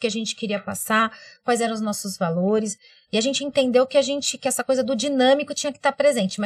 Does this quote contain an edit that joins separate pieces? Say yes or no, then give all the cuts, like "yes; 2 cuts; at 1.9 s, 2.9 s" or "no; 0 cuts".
no; 0 cuts